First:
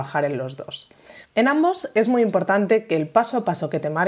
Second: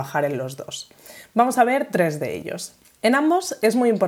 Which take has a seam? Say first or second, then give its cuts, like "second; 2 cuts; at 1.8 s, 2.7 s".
first; 1 cut; at 1.2 s